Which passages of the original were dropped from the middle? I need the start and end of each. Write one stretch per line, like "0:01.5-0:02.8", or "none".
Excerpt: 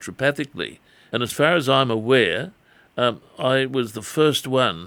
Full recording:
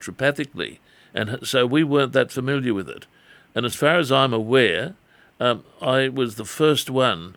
0:01.1-0:03.5